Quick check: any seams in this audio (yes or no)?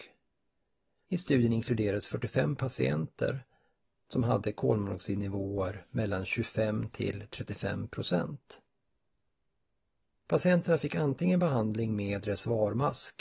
yes